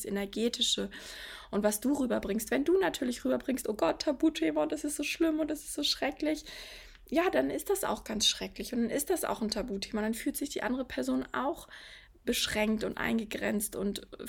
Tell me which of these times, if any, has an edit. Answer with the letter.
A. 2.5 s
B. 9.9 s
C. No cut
C